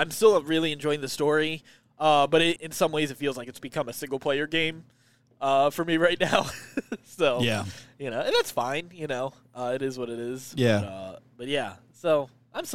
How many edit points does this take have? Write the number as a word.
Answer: one